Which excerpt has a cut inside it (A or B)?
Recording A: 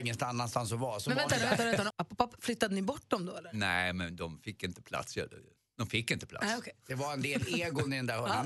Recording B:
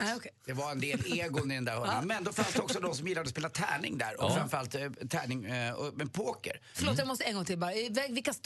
A